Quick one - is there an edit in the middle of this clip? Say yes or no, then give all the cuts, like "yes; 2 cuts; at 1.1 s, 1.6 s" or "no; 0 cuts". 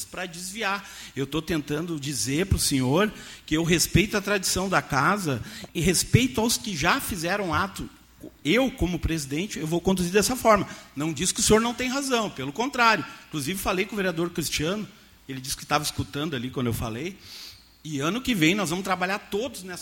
yes; 1 cut; at 5.7 s